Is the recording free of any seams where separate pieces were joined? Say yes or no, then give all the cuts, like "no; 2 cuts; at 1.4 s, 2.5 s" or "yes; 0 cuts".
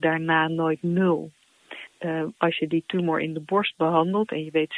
no; 1 cut; at 1.9 s